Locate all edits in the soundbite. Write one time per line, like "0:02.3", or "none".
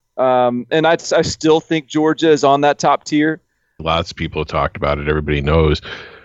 0:03.8